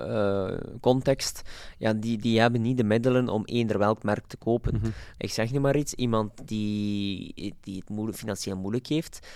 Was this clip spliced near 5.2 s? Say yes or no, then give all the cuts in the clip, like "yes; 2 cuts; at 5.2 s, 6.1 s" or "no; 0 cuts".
yes; 1 cut; at 5.2 s